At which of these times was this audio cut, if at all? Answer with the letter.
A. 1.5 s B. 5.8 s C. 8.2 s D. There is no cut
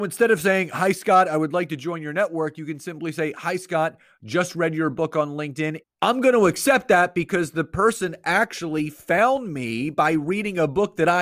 B